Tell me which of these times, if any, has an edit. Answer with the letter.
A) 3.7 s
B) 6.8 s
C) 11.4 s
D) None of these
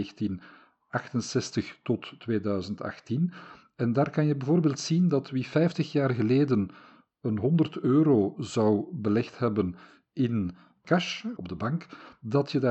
C